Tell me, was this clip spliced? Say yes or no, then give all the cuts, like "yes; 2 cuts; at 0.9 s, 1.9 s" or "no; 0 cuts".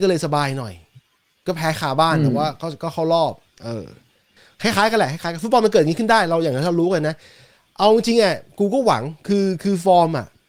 no; 0 cuts